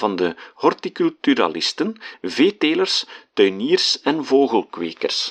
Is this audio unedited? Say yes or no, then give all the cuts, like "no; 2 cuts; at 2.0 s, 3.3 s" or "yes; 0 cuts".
yes; 0 cuts